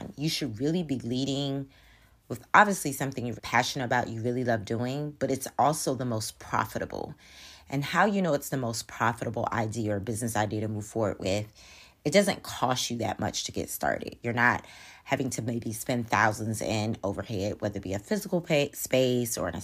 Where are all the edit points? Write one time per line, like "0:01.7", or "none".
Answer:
0:03.4
0:14.2